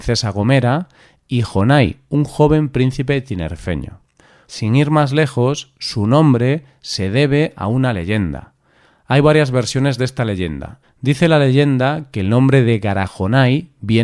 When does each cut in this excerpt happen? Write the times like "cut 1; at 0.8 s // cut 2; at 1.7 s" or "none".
cut 1; at 4.4 s // cut 2; at 10.8 s